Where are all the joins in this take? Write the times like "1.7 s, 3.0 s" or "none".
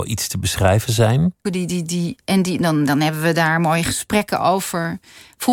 1.4 s